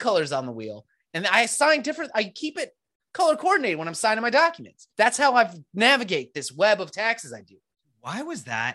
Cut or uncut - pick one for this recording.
cut